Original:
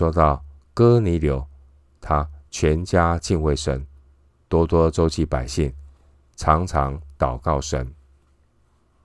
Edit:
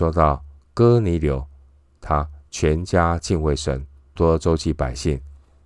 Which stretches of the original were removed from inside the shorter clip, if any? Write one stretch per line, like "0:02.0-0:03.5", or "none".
0:04.2-0:04.7

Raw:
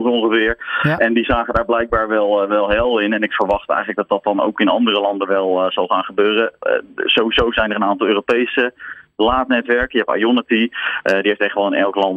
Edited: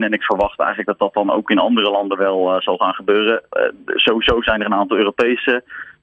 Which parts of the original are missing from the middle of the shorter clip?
none

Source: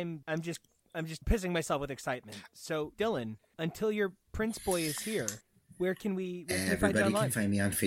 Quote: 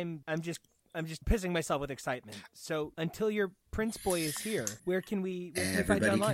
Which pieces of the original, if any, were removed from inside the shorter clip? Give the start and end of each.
0:02.9-0:03.5
0:05.4-0:05.7

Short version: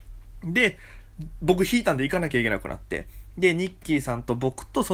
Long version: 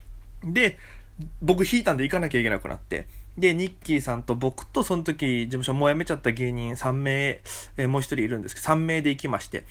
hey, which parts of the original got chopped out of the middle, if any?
none

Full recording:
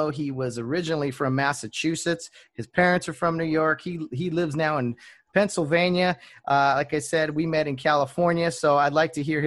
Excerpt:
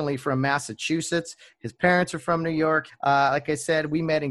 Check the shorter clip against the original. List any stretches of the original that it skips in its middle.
0:03.8-0:06.3

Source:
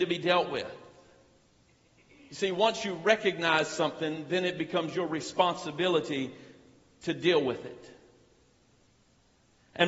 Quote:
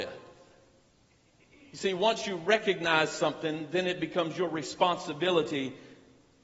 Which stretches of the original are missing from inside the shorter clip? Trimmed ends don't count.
none

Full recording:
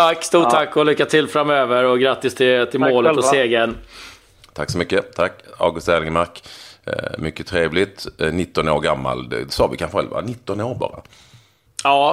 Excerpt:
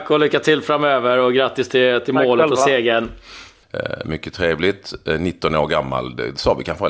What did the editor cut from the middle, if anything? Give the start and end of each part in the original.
0:04.3-0:06.8

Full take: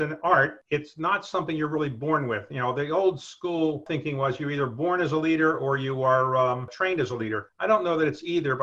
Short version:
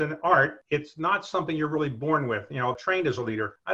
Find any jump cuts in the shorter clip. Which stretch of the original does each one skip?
0:02.7-0:06.7

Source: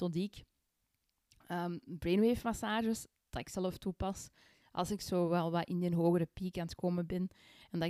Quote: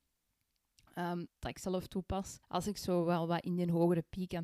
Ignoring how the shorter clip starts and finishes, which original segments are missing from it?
0:01.8-0:03.2
0:04.3-0:04.7

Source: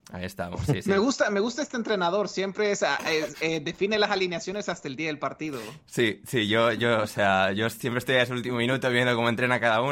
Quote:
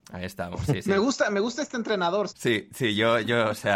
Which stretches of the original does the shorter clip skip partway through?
0:02.3-0:05.8

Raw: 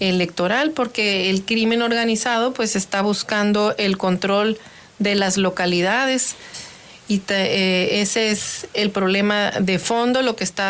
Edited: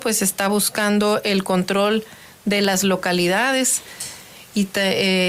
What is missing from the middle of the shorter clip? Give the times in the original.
none

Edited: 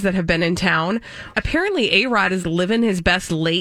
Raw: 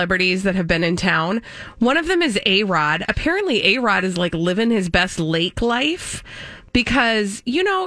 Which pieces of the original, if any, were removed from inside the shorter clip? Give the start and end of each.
0:01.8-0:03.1
0:04.1-0:04.3

